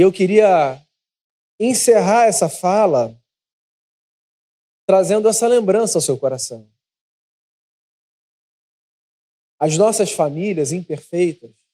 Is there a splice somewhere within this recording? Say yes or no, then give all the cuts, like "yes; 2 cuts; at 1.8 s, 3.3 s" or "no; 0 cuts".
no; 0 cuts